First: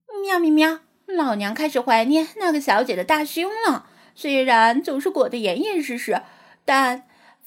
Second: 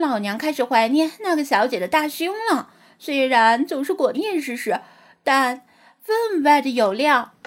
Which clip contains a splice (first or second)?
second